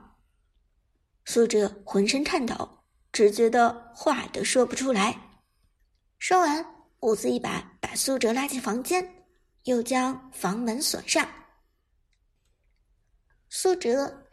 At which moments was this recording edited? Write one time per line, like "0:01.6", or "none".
0:01.1
0:06.2
0:12.4